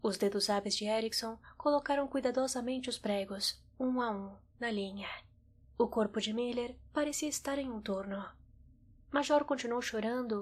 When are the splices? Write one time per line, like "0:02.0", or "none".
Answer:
0:05.6
0:09.0